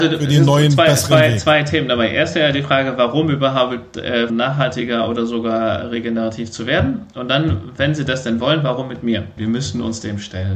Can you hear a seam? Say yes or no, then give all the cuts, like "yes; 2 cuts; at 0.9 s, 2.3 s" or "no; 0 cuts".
yes; 2 cuts; at 4.3 s, 9.4 s